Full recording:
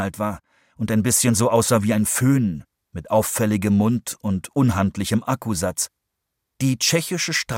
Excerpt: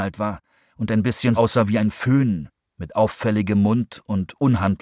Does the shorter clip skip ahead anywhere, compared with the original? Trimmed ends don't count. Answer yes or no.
yes